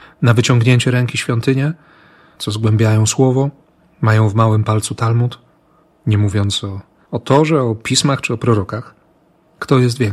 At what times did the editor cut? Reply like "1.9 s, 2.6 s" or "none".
none